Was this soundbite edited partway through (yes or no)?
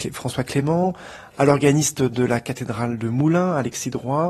no